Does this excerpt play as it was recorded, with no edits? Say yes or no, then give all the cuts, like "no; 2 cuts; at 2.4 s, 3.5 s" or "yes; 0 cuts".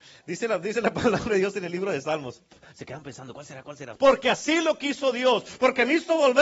no; 1 cut; at 4.0 s